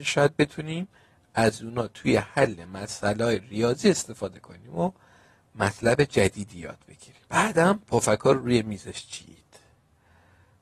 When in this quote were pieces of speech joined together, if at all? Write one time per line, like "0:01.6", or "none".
0:07.3

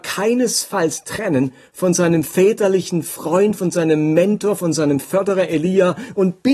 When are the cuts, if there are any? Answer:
none

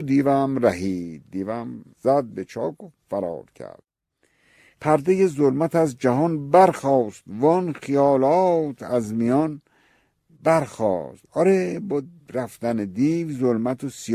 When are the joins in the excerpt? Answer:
0:01.9

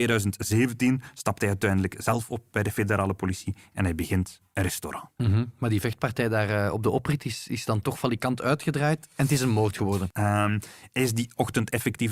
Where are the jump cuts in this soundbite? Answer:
0:05.2
0:10.1

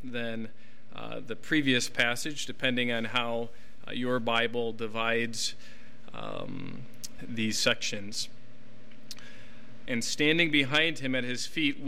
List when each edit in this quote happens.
0:07.2
0:09.9

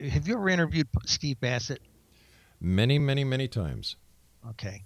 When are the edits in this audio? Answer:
none

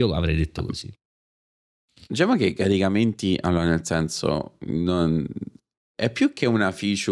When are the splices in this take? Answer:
none

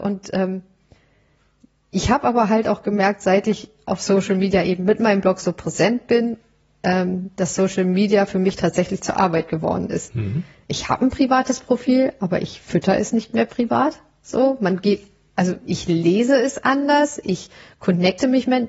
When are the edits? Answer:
none

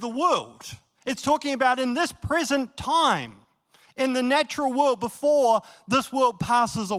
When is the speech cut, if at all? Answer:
none

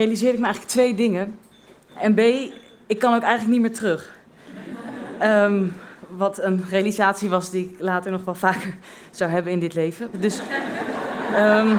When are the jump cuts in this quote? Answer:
0:01.9
0:10.1

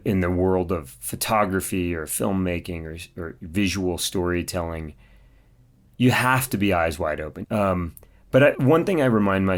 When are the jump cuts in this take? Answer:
0:07.4
0:08.5

